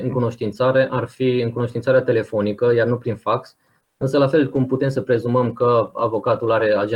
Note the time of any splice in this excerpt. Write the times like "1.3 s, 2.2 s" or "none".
3.8 s